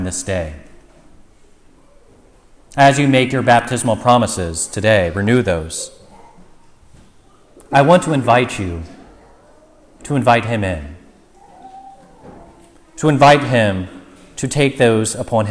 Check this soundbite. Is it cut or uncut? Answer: uncut